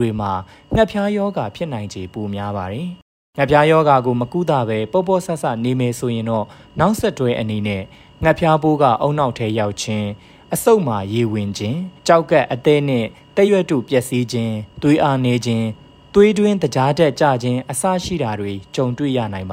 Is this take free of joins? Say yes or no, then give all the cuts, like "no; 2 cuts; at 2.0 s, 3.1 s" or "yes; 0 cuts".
no; 2 cuts; at 12.0 s, 13.5 s